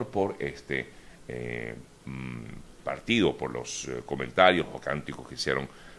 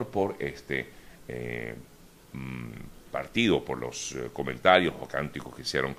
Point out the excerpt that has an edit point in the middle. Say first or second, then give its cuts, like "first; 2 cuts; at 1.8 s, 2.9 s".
first; 1 cut; at 1.9 s